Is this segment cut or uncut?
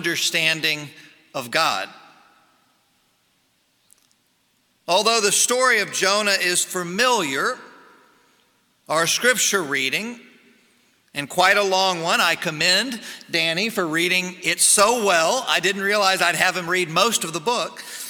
uncut